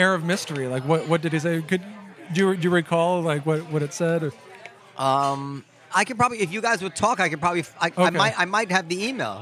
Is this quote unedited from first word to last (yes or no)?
no